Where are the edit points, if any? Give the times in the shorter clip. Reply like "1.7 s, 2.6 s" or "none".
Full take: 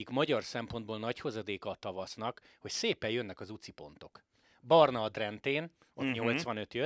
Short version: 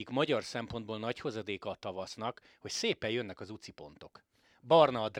none